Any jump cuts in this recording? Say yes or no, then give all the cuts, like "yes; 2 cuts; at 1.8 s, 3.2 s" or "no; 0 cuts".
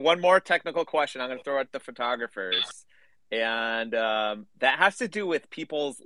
no; 0 cuts